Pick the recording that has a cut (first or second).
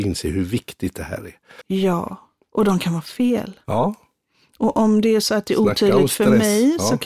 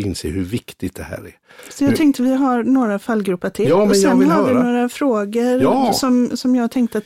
first